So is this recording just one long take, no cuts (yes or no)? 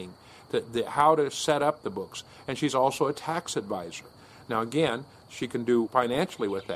no